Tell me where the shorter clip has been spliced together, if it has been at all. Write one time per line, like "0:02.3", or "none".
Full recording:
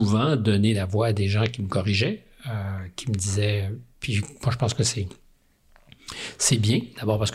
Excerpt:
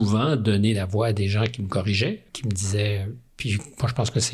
0:02.3